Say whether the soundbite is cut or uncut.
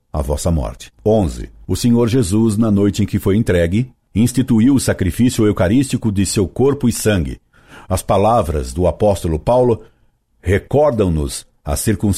cut